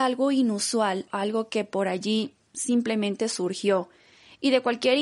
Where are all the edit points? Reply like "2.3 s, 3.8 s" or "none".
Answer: 1.1 s